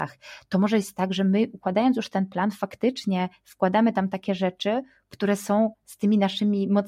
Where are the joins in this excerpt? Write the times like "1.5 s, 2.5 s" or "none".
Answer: none